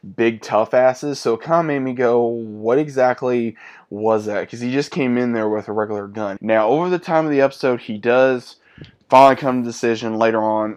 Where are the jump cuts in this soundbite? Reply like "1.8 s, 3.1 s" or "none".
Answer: 6.4 s